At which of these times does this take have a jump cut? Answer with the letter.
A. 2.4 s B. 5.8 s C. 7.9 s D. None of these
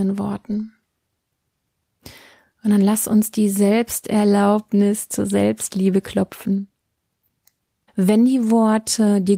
C